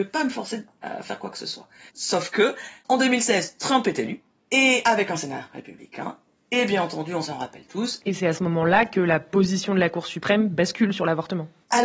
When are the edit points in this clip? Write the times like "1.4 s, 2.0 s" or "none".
1.9 s, 8.0 s